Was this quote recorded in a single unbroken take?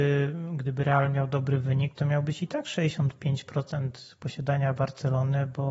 yes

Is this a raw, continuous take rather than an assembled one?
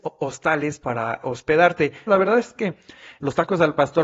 no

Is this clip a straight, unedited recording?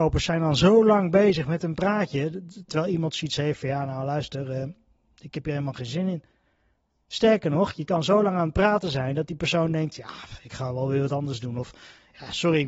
no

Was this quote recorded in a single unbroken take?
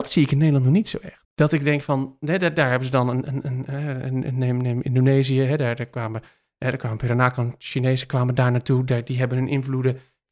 no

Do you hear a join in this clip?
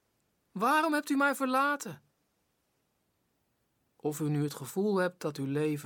no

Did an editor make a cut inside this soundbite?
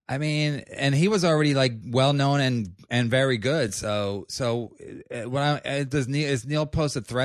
no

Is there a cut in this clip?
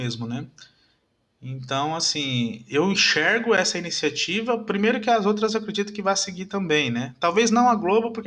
yes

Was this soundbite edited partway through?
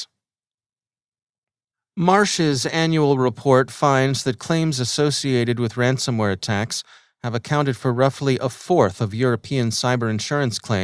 no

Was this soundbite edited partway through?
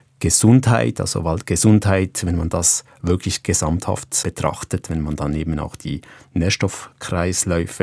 yes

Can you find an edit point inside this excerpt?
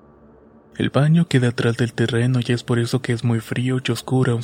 no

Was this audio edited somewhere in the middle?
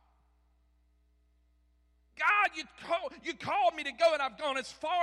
no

